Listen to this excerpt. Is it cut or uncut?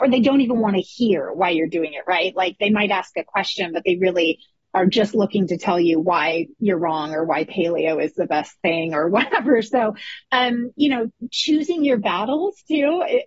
uncut